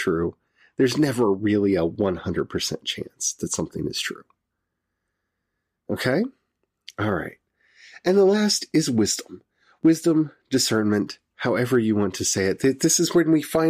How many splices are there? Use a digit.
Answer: 0